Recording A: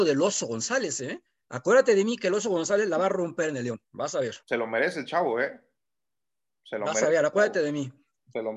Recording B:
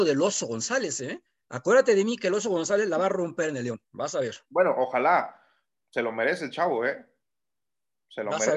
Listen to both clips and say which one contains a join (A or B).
A